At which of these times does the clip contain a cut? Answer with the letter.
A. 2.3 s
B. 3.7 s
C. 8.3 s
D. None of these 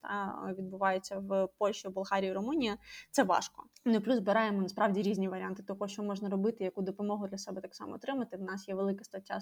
B